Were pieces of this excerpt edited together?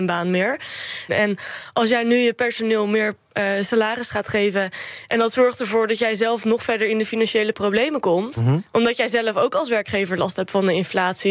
yes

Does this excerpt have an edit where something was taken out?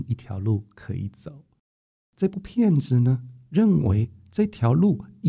no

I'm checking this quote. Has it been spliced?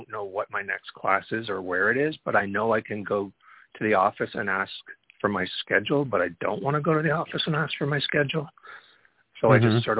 no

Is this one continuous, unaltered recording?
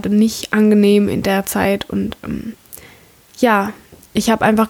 yes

